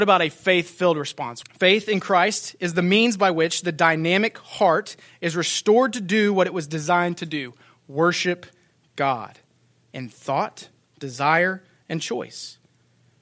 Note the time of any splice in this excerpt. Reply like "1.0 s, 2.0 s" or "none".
1.4 s